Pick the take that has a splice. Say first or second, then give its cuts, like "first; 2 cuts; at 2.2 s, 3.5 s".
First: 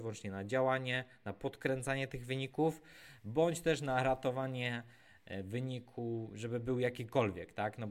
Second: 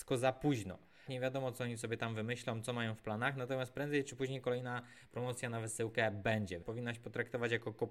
second; 2 cuts; at 1.1 s, 6.6 s